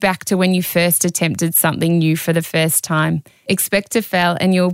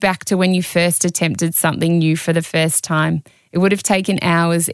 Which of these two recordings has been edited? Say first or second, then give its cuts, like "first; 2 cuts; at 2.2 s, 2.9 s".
first; 1 cut; at 3.4 s